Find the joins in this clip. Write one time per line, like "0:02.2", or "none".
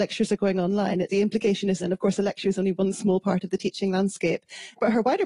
0:01.8